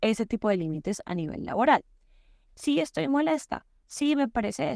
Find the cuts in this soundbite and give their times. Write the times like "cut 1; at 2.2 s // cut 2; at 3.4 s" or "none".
cut 1; at 2.5 s